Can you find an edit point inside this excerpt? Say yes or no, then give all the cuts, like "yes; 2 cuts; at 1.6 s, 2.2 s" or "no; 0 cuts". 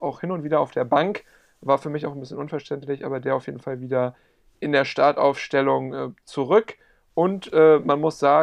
no; 0 cuts